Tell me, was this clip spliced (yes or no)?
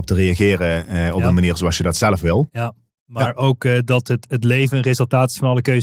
yes